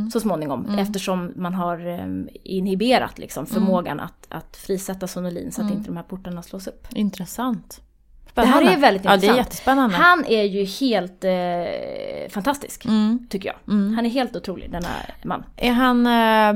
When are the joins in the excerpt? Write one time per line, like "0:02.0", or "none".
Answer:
none